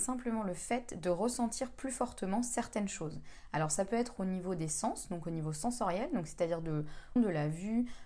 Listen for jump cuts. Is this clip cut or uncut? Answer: cut